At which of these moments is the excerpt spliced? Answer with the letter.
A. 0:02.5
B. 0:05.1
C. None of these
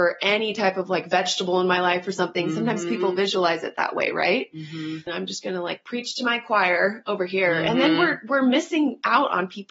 B